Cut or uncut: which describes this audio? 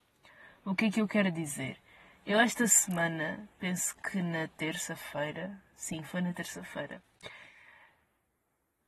uncut